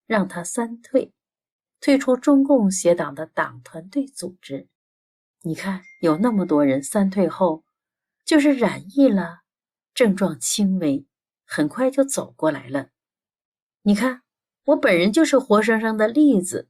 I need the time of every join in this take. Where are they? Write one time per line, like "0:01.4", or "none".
0:05.3